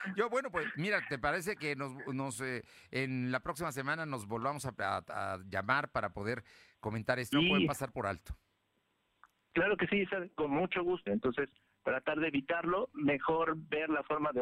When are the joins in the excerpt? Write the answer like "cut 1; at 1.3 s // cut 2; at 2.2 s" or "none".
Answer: cut 1; at 7.3 s // cut 2; at 11.1 s